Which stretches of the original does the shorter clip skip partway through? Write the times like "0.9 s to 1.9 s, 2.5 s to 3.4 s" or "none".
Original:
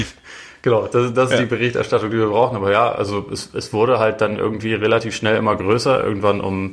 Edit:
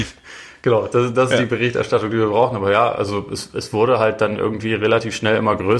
none

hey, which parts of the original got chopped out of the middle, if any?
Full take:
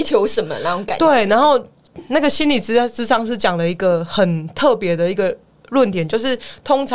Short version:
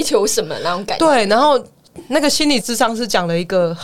2.6 s to 2.9 s

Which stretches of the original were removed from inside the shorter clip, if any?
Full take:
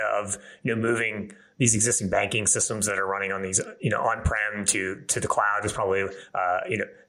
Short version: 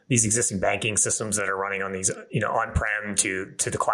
none

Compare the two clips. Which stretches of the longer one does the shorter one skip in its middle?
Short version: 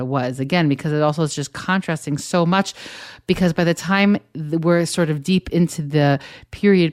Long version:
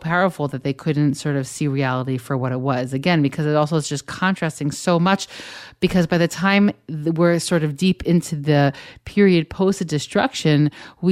none

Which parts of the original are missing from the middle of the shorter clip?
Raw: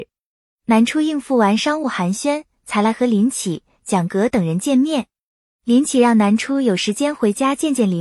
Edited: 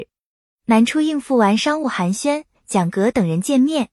2.5 s to 3.7 s

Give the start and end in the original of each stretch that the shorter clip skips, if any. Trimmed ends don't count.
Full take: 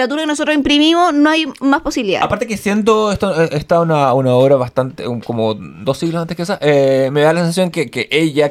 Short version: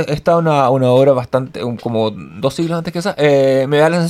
none

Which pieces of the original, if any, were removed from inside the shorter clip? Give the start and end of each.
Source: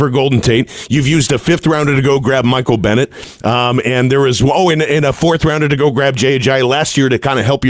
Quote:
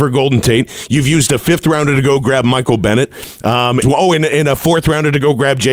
3.8 s to 4.4 s

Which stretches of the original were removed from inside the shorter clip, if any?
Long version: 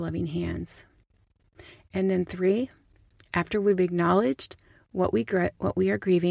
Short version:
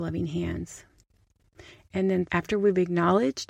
2.3 s to 3.3 s

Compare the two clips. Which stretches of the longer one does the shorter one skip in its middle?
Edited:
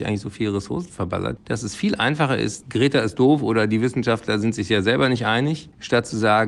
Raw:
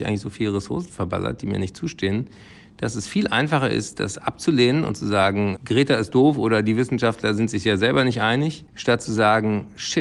1.4 s to 2.7 s, 3.9 s to 5.6 s

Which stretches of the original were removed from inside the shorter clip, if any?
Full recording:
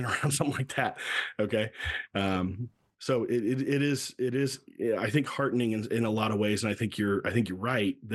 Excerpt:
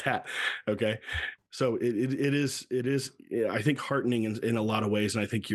2.1 s to 2.9 s

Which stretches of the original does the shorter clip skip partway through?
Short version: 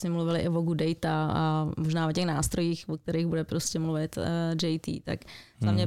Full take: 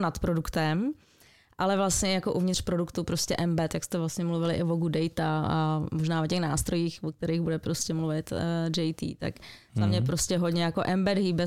none

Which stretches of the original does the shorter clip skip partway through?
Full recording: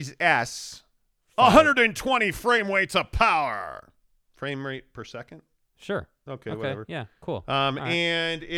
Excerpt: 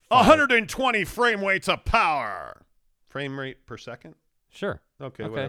none

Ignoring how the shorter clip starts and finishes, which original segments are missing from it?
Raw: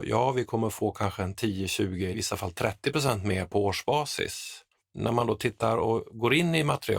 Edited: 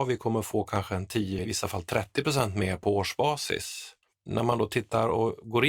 1.7 s to 2.1 s

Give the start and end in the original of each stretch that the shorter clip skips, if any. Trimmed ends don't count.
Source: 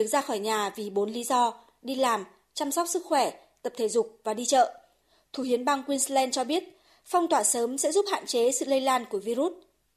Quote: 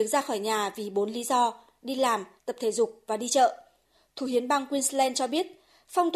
2.4 s to 3.5 s

